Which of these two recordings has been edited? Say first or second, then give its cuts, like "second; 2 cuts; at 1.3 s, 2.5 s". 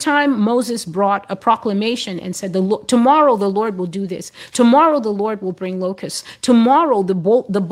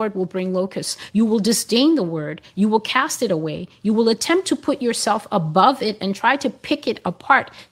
second; 1 cut; at 1.1 s